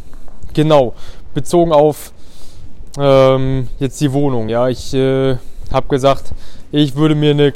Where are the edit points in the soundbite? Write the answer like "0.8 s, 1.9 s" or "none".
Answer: none